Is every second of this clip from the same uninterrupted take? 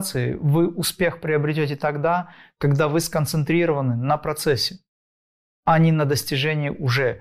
yes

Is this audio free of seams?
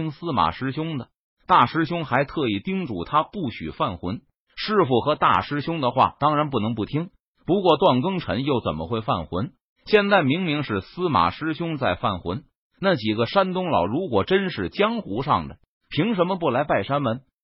yes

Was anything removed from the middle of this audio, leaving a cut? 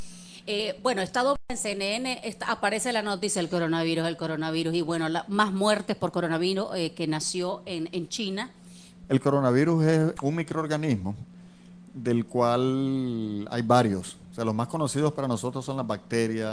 yes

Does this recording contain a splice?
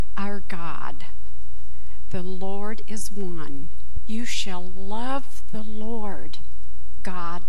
no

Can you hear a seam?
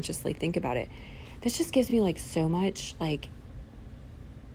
no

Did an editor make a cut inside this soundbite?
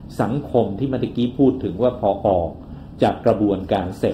no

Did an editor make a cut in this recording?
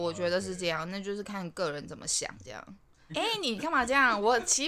yes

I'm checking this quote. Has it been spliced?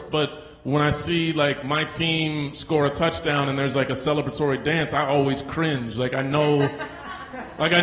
no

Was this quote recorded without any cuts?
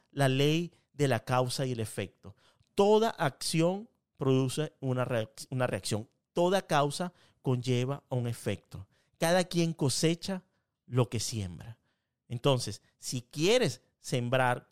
yes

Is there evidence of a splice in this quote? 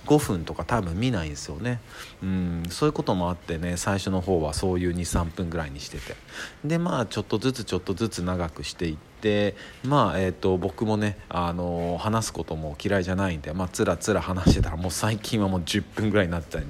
no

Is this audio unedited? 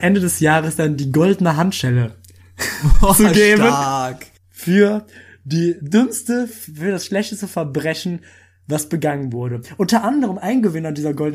no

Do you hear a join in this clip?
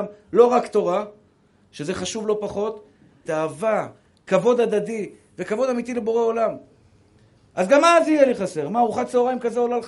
yes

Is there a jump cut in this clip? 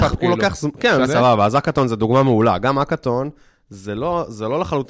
yes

